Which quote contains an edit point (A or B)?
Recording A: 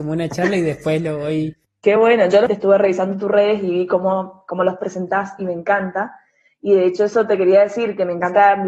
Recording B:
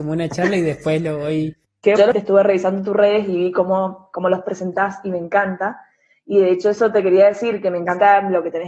B